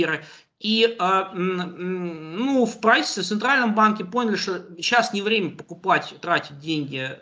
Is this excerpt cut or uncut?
uncut